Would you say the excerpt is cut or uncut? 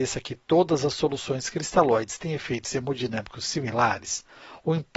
uncut